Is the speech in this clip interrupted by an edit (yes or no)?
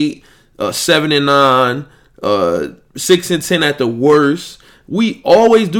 no